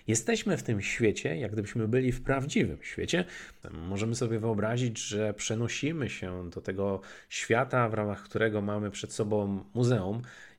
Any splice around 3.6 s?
yes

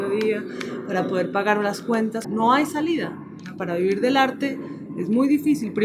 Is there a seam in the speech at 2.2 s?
yes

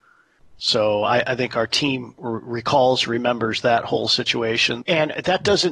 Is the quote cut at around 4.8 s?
yes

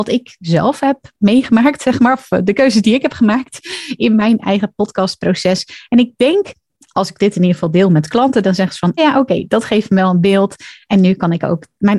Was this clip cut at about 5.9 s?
no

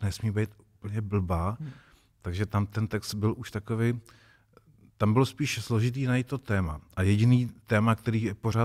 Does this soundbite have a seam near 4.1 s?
no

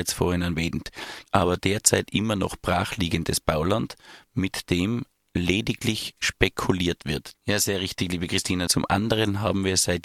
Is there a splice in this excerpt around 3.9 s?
no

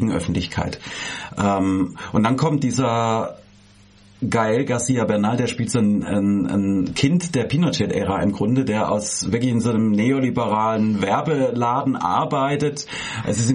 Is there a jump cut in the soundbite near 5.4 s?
no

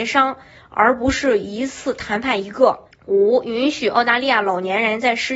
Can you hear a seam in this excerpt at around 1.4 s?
no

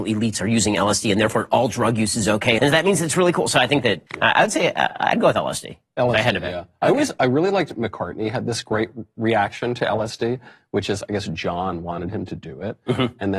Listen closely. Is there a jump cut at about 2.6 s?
yes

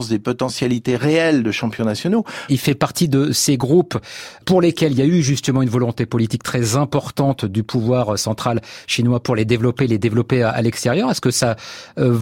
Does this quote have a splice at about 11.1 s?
no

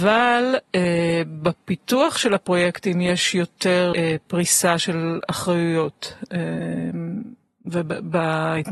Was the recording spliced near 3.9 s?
yes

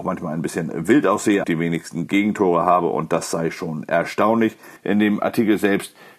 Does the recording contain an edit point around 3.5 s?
no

